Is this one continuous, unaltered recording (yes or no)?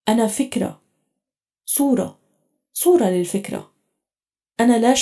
yes